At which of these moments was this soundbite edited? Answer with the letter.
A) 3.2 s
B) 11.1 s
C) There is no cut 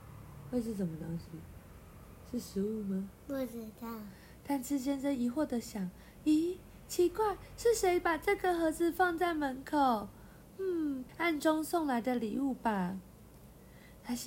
B